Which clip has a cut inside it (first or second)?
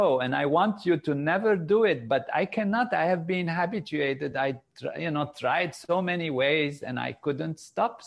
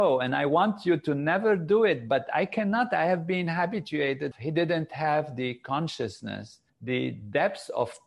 second